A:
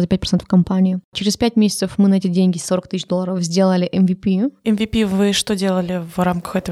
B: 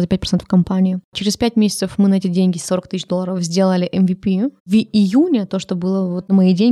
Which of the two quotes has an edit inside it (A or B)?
B